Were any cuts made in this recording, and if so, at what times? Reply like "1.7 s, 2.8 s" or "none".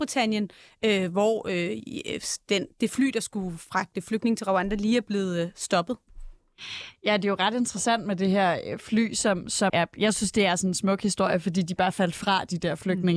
9.7 s